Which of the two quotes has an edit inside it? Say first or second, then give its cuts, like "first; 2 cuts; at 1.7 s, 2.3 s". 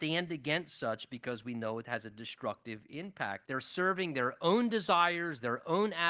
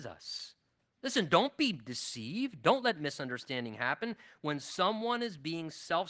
first; 1 cut; at 3.4 s